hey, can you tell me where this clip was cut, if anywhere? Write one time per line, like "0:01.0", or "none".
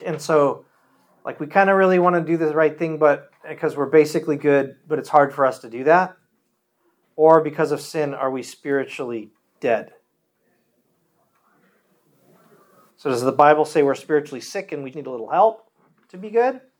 0:12.9
0:14.9